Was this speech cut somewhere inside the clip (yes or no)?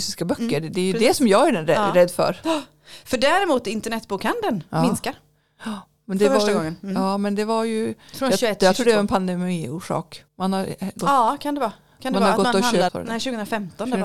yes